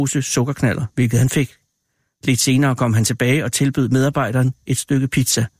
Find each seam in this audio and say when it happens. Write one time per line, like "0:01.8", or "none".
none